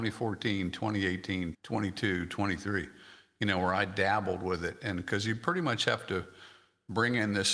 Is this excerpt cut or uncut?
cut